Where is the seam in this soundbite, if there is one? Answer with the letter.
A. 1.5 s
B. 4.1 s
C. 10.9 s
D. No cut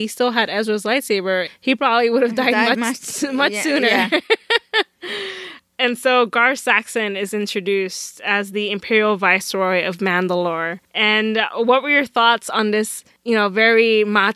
A